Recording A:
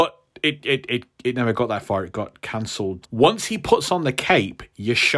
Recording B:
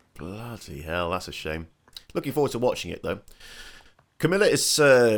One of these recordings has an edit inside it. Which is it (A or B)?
A